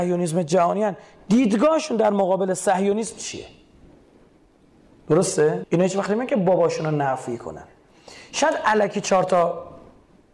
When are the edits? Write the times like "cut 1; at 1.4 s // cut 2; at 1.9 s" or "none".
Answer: cut 1; at 5.6 s